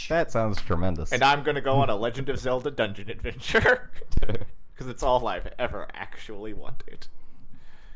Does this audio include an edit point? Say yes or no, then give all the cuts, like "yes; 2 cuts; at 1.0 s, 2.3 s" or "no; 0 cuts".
no; 0 cuts